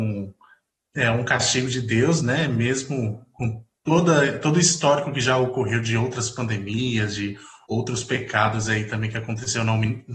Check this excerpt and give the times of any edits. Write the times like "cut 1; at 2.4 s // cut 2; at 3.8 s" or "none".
none